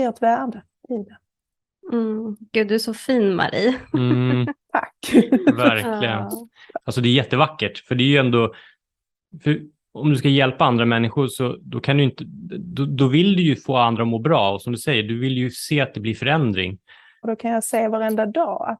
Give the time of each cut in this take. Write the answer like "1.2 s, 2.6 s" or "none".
6.8 s, 13.0 s, 17.2 s